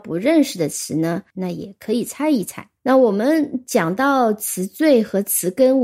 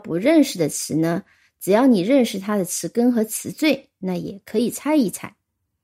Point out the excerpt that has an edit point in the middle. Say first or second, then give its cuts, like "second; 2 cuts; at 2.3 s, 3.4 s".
first; 2 cuts; at 1.3 s, 2.8 s